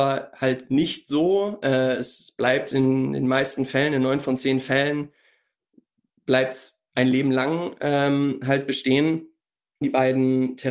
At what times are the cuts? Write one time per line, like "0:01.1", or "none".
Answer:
0:09.8